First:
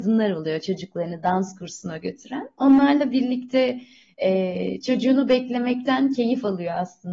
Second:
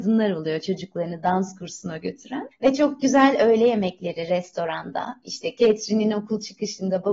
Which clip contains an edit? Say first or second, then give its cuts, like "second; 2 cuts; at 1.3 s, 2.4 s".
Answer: second; 1 cut; at 2.5 s